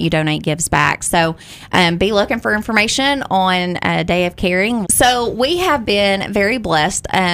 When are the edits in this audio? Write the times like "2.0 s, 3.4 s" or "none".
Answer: 4.8 s